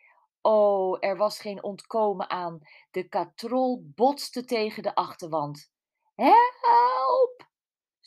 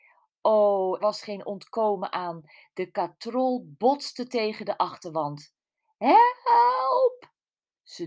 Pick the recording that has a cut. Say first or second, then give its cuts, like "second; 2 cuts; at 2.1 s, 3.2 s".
second; 1 cut; at 1.0 s